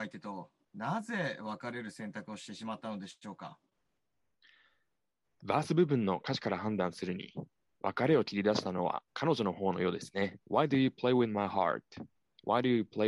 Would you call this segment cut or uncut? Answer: cut